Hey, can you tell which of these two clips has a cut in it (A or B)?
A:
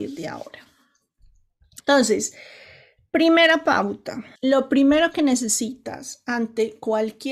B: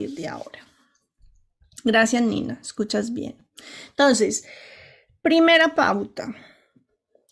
A